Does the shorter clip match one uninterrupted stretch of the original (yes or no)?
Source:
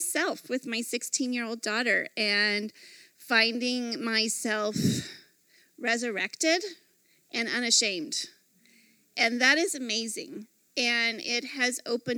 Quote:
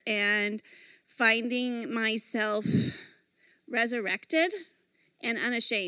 yes